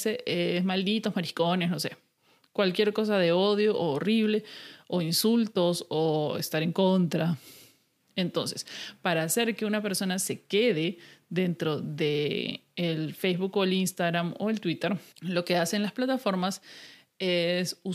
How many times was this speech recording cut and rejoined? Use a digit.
2